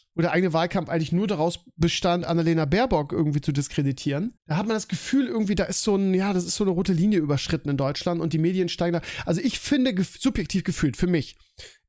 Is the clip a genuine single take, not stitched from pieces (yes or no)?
no